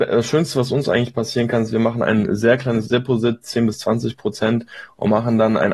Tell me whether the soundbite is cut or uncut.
uncut